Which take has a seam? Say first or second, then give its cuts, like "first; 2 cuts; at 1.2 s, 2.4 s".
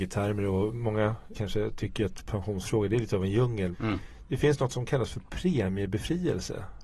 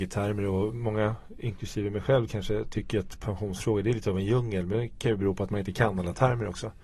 first; 2 cuts; at 1.3 s, 3.7 s